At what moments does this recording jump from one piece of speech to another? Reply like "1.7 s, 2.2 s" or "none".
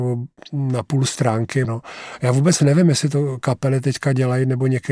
1.6 s